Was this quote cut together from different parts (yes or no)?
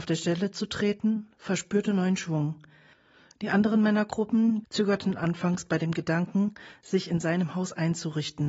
yes